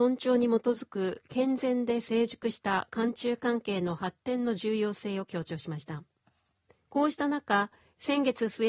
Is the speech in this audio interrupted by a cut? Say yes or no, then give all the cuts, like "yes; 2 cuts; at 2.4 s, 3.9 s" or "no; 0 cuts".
yes; 1 cut; at 6.8 s